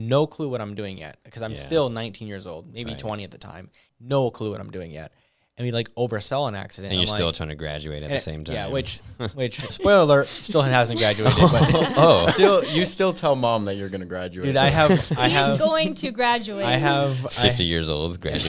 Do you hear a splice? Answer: yes; 2 cuts; at 3.9 s, 9.7 s

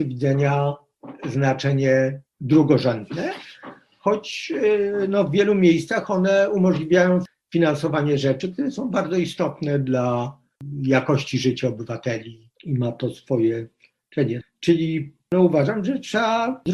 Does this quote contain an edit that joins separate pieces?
no; 0 cuts

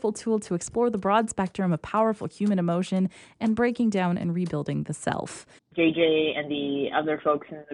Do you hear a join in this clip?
yes; 1 cut; at 5.6 s

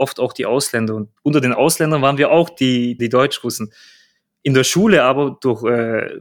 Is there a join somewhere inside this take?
yes; 2 cuts; at 1.2 s, 3.0 s

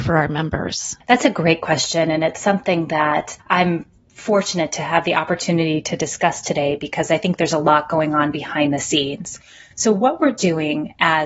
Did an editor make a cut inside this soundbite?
no; 0 cuts

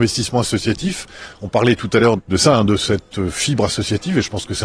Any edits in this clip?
yes; 1 cut; at 2.2 s

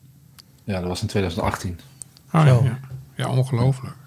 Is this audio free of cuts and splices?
yes; 0 cuts

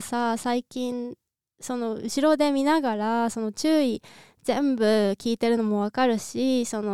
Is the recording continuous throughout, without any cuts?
yes; 0 cuts

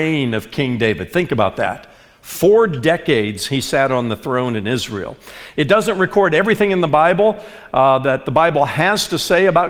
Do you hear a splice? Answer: no; 0 cuts

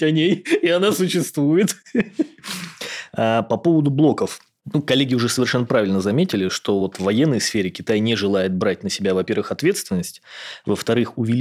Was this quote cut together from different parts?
no; 0 cuts

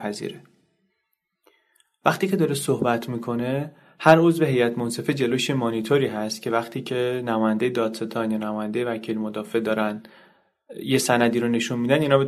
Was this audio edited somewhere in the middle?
no; 0 cuts

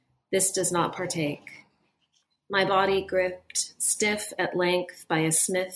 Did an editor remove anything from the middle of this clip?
no; 0 cuts

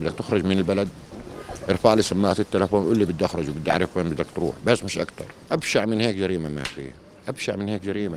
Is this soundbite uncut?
yes; 0 cuts

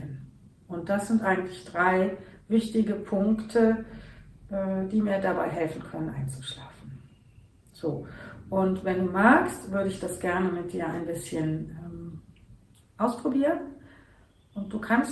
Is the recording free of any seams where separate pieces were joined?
yes; 0 cuts

